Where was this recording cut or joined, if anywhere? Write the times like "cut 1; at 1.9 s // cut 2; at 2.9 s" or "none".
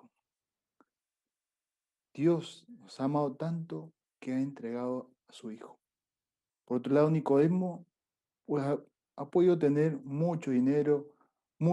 cut 1; at 6.5 s